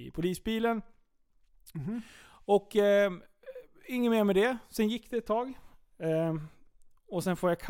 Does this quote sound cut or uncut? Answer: uncut